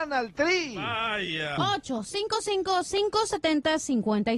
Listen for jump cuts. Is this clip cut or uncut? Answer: cut